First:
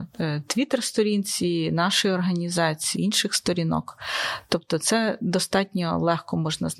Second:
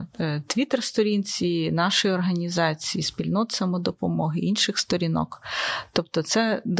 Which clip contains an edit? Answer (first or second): first